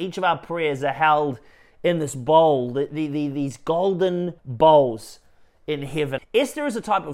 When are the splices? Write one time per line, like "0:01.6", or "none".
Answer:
0:04.4
0:06.2